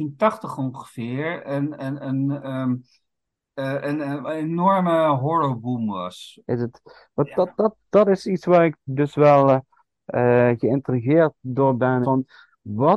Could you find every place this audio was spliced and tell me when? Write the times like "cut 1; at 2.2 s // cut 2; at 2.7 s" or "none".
cut 1; at 6.4 s // cut 2; at 12.0 s